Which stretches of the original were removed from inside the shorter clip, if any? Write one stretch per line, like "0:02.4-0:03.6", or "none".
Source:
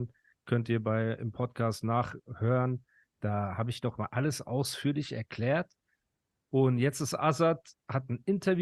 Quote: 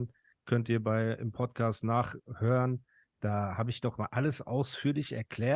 none

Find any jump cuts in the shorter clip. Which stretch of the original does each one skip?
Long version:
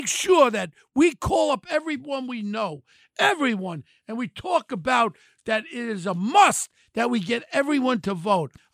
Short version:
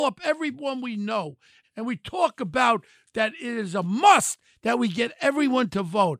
0:03.1-0:03.9

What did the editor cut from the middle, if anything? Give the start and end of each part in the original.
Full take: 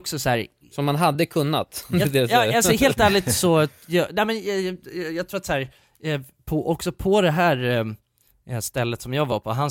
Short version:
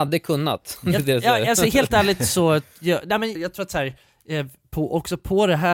0:04.4-0:05.1

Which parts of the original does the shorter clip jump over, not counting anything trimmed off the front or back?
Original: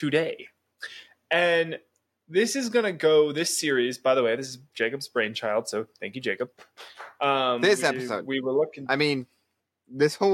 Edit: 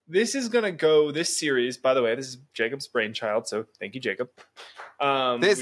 none

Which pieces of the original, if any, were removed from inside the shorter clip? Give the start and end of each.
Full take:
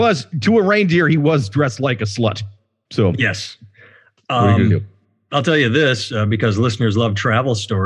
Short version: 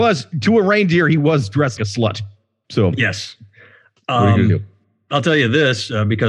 0:01.8-0:02.0

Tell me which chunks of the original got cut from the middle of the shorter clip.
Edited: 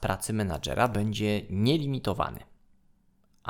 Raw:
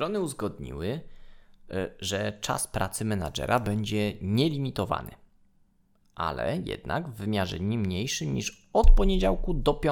none

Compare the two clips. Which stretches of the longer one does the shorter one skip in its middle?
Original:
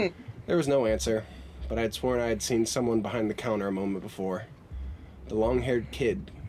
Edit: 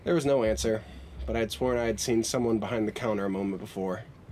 none

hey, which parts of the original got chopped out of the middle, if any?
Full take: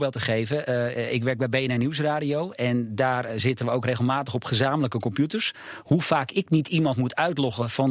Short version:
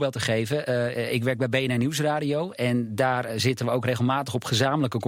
none

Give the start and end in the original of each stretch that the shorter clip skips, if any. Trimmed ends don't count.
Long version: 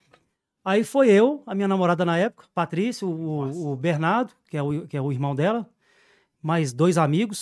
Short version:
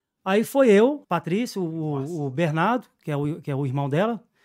0:01.4-0:02.5

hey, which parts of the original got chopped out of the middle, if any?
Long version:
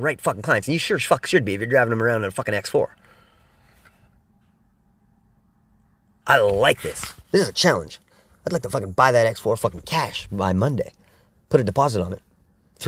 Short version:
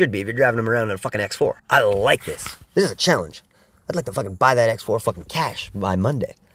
0:02.9-0:06.2

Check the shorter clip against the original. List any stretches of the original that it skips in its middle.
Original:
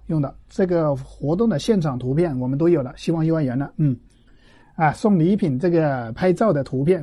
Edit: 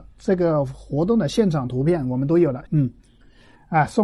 0:03.0-0:03.7

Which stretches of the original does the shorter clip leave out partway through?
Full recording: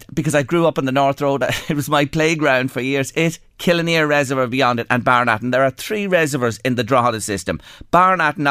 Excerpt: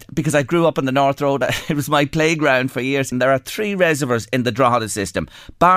0:03.1-0:05.4

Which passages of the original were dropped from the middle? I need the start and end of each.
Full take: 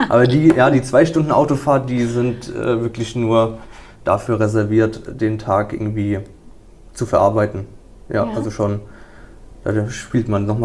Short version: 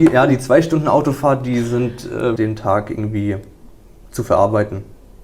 0:02.8-0:05.2

